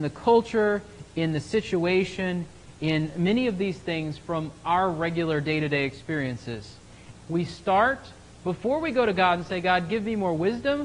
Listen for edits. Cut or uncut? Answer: cut